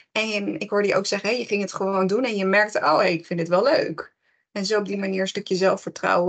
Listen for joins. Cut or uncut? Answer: uncut